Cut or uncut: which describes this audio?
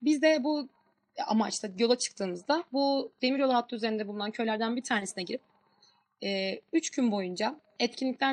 uncut